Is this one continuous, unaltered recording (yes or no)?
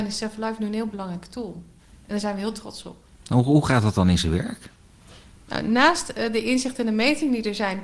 yes